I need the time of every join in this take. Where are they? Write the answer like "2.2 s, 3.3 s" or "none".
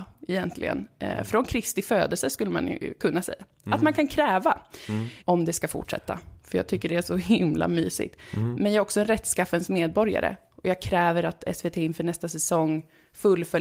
5.2 s, 6.4 s